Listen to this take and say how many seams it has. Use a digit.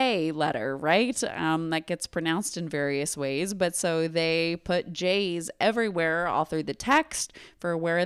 0